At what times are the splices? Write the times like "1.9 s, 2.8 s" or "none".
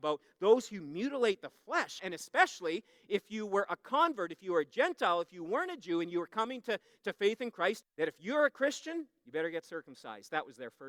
2.0 s, 7.8 s